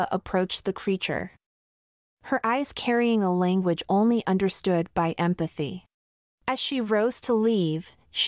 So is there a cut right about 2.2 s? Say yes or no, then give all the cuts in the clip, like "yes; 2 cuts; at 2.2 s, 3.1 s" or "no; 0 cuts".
no; 1 cut; at 6.3 s